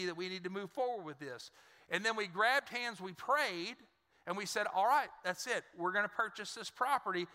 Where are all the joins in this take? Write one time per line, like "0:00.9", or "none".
none